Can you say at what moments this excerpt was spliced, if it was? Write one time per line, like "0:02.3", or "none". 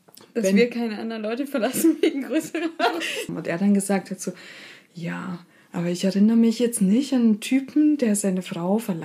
0:03.3